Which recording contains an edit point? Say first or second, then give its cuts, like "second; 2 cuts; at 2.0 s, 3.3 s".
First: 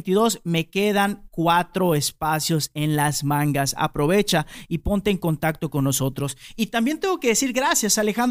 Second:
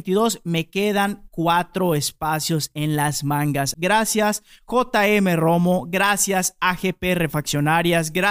second; 1 cut; at 3.7 s